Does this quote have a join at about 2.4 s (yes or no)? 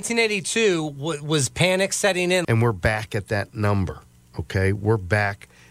yes